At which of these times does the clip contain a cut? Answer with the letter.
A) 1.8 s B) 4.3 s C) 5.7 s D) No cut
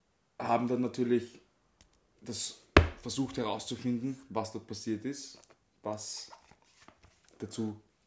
D